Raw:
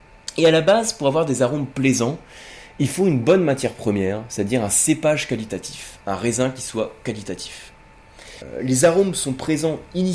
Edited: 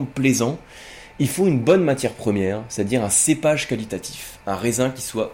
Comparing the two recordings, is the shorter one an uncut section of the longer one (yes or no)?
yes